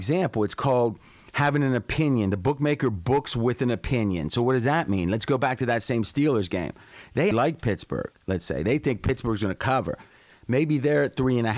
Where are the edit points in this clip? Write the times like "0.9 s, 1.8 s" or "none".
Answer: 7.3 s, 10.3 s